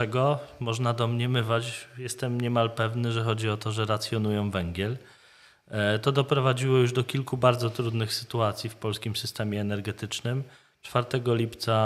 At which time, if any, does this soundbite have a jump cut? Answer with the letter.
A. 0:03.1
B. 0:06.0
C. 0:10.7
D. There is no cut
D